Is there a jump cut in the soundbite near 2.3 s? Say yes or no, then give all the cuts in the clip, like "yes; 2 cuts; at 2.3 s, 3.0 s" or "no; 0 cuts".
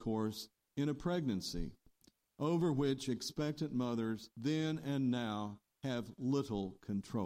no; 1 cut; at 4.3 s